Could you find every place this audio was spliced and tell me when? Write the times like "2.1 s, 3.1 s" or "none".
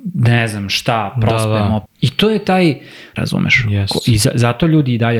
1.9 s, 3.2 s